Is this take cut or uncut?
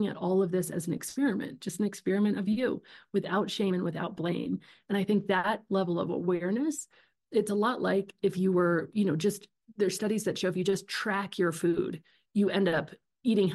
uncut